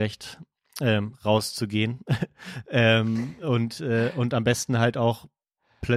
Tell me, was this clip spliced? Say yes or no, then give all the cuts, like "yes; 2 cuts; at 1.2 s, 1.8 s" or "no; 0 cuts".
no; 0 cuts